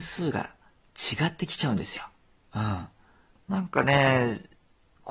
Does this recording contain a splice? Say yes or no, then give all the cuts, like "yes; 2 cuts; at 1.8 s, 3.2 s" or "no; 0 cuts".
yes; 1 cut; at 3.3 s